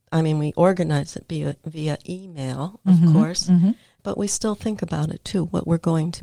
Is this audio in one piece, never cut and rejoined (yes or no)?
yes